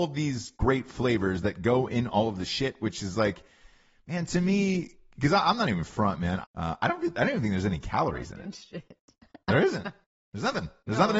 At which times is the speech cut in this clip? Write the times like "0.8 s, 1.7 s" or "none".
6.4 s